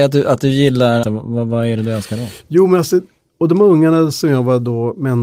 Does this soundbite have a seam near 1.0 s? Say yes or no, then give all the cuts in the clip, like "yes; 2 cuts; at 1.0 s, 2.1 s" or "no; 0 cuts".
yes; 1 cut; at 1.0 s